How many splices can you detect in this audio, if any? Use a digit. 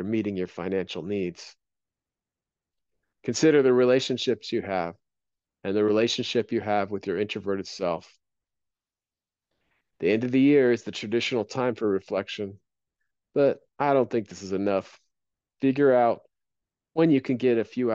0